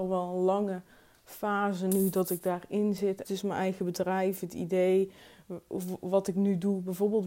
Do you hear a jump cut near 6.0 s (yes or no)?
no